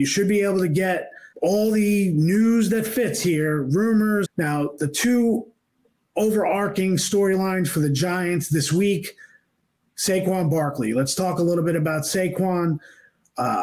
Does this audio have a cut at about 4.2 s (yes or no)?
yes